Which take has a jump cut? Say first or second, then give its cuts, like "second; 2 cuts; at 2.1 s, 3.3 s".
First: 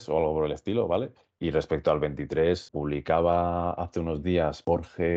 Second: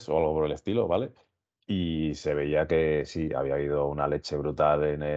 first; 2 cuts; at 1.4 s, 2.7 s